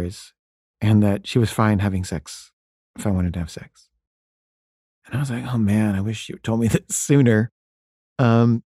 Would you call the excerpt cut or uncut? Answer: uncut